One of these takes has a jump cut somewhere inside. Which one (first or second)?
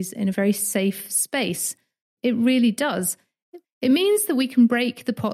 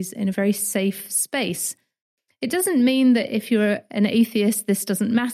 first